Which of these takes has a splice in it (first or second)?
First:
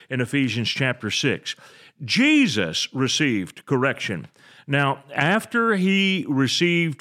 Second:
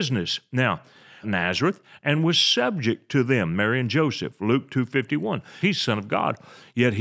second